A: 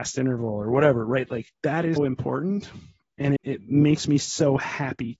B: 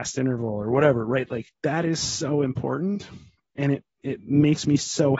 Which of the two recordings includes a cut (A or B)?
A